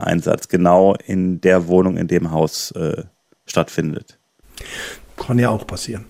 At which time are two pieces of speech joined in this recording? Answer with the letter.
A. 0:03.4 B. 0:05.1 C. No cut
B